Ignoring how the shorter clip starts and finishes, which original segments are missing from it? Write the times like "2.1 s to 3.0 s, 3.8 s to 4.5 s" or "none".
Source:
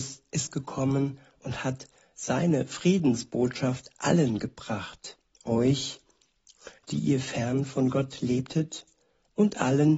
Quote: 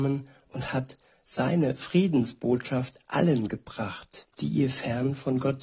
5.2 s to 6.8 s